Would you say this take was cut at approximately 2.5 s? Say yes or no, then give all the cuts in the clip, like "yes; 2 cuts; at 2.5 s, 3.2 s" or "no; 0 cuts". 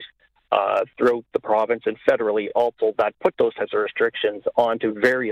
no; 0 cuts